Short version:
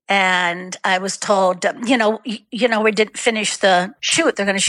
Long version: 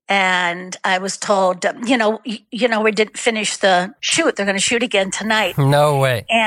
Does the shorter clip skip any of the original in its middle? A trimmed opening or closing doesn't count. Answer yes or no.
no